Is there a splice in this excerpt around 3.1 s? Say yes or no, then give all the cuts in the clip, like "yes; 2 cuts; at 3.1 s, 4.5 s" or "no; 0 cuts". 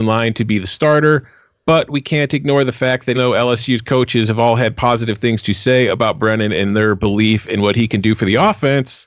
yes; 1 cut; at 3.1 s